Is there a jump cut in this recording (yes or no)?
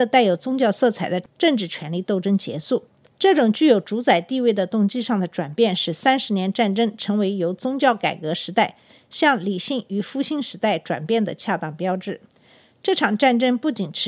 no